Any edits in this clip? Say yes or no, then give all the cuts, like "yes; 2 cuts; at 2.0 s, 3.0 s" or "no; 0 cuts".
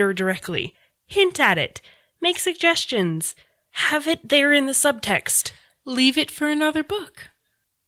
no; 0 cuts